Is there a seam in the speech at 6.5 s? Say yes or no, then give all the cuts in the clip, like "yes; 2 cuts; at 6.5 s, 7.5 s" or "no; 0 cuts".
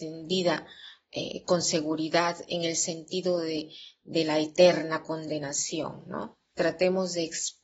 yes; 1 cut; at 6.5 s